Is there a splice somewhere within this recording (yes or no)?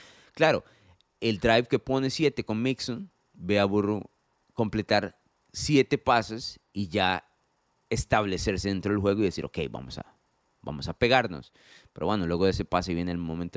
no